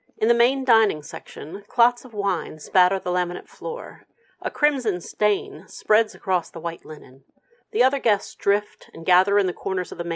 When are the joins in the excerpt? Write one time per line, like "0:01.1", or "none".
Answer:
0:07.6